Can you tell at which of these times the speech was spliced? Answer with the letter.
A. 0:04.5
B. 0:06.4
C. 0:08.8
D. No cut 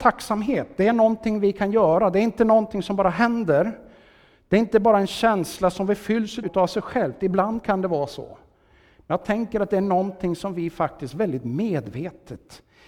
B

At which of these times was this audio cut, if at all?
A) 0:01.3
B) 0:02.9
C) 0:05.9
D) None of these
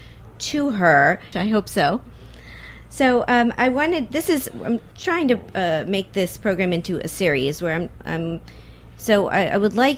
A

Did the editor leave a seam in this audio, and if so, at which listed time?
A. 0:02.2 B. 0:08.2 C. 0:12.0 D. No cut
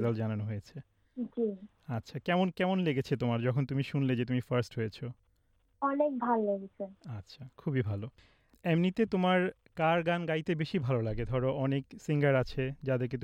D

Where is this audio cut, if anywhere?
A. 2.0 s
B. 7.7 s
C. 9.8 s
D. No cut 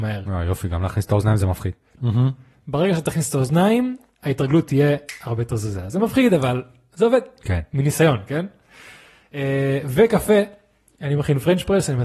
A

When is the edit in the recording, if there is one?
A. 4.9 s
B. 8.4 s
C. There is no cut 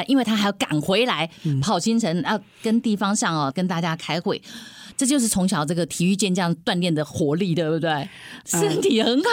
C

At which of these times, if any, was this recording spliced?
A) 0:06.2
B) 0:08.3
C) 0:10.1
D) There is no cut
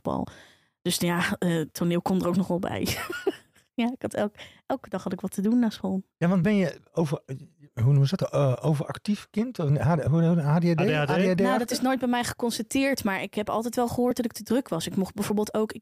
D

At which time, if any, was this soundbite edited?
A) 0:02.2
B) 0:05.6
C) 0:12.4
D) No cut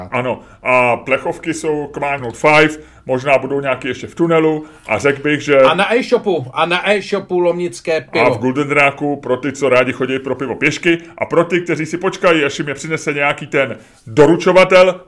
A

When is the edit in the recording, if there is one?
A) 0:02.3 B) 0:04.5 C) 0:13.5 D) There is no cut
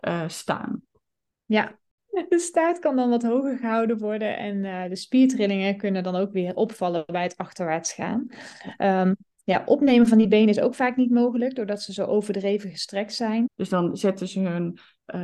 C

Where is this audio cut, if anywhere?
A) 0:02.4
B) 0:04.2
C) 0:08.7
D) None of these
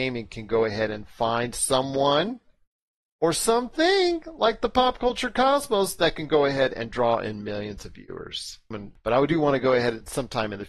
C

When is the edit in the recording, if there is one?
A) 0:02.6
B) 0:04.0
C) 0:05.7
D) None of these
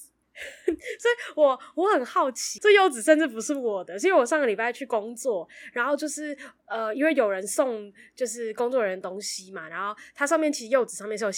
A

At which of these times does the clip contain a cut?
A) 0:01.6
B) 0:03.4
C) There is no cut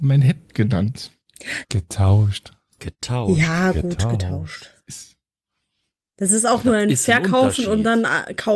A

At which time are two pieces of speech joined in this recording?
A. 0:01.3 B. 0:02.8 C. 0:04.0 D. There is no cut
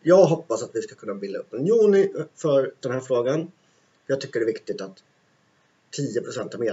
B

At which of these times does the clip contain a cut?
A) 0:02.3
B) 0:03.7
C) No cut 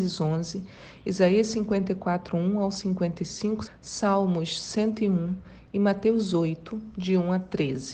B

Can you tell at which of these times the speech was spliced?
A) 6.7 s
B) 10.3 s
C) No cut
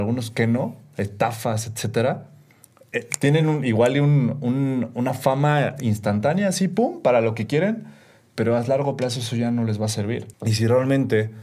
B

